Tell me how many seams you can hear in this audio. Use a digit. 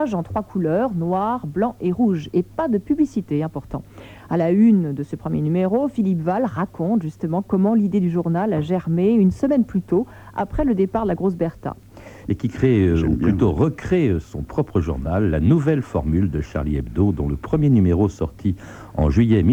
1